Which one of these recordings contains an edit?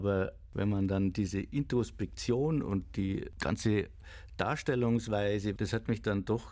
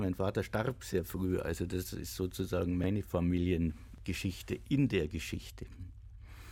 first; 1 cut; at 5.6 s

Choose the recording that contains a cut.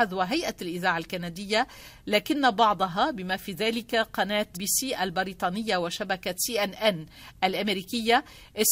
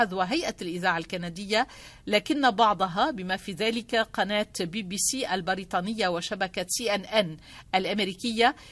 first; 1 cut; at 4.5 s

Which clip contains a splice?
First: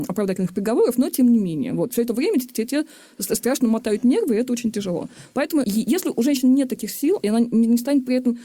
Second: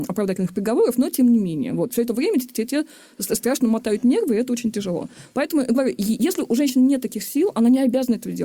first; 2 cuts; at 5.6 s, 7.2 s

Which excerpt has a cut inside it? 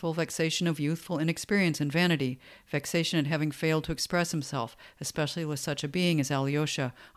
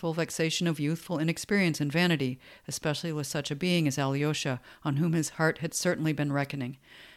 second; 1 cut; at 2.6 s

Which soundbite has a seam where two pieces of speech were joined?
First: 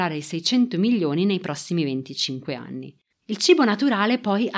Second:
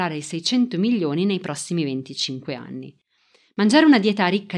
first; 1 cut; at 3.1 s

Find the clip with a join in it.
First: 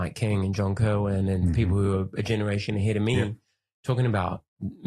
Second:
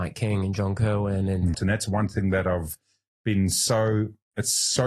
second; 1 cut; at 1.5 s

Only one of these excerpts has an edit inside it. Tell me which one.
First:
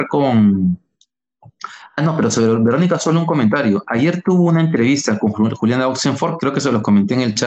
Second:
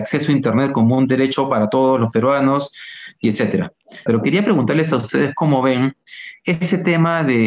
second; 1 cut; at 4.1 s

